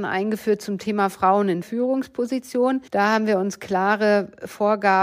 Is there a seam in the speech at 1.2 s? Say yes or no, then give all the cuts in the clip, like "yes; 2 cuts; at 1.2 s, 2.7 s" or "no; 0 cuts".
no; 1 cut; at 2.9 s